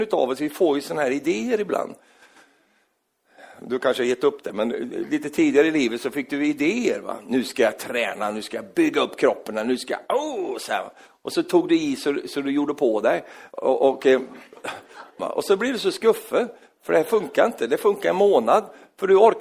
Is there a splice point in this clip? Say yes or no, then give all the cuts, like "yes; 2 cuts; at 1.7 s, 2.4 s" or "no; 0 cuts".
yes; 1 cut; at 15.2 s